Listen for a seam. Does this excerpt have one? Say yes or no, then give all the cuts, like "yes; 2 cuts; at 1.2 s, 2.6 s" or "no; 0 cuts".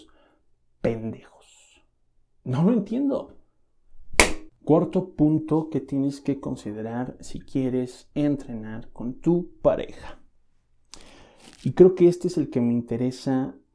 yes; 1 cut; at 4.5 s